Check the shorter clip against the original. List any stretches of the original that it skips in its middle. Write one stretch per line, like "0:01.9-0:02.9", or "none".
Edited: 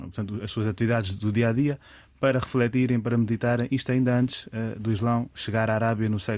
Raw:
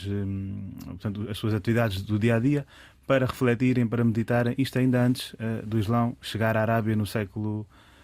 none